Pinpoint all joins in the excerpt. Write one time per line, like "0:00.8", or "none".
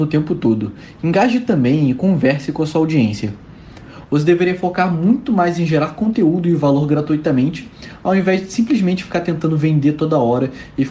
0:04.0